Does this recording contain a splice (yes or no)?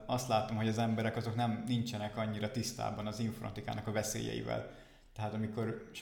no